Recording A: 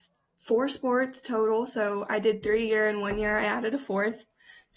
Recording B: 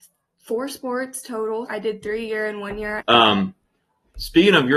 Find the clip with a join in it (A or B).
B